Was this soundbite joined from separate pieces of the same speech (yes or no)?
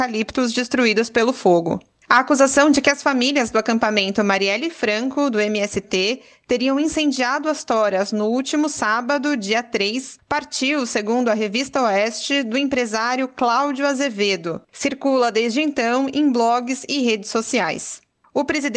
no